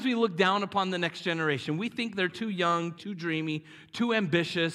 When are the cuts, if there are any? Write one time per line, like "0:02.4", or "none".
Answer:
0:03.0